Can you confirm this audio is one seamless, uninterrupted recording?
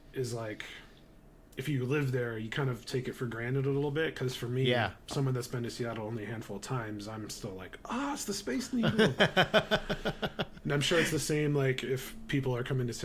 yes; 0 cuts

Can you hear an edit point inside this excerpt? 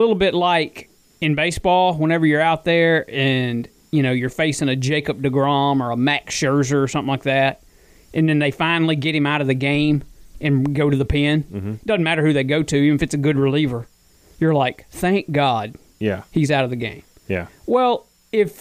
no; 0 cuts

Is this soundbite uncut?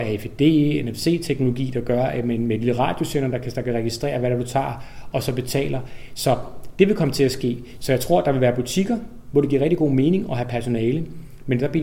yes; 0 cuts

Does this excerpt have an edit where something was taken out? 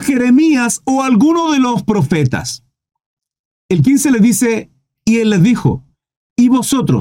no; 0 cuts

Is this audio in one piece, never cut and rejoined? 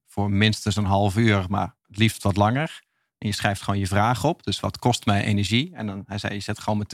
yes; 0 cuts

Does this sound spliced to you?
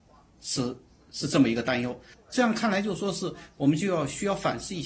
yes; 1 cut; at 2.1 s

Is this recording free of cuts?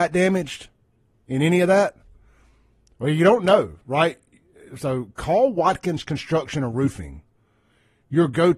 yes; 0 cuts

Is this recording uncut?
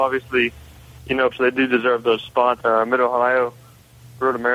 no; 2 cuts; at 1.3 s, 2.6 s

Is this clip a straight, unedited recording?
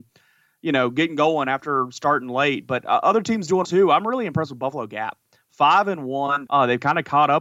no; 2 cuts; at 3.6 s, 6.5 s

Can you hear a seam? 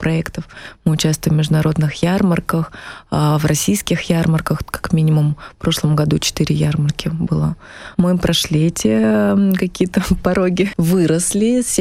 yes; 2 cuts; at 7.9 s, 10.7 s

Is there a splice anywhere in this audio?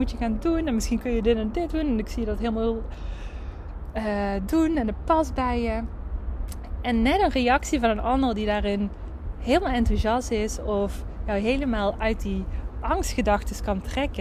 no; 0 cuts

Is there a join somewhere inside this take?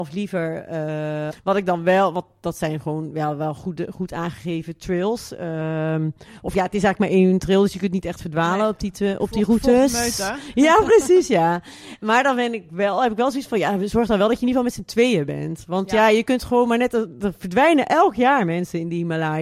yes; 1 cut; at 1.3 s

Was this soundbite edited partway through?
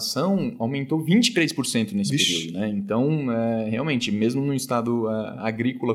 no; 0 cuts

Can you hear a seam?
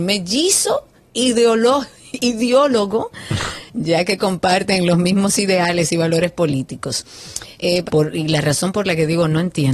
yes; 1 cut; at 7.8 s

